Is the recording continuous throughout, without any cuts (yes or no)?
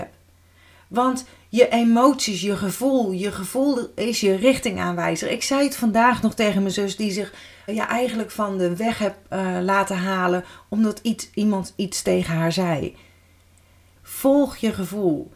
no